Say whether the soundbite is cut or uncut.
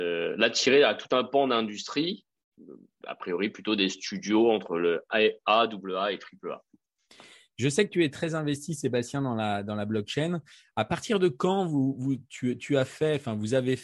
uncut